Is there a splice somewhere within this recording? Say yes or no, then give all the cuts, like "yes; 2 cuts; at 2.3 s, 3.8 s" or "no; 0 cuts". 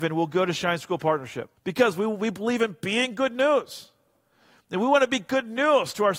yes; 1 cut; at 1.6 s